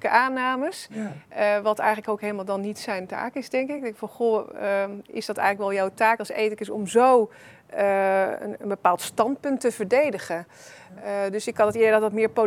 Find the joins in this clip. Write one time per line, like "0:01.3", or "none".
none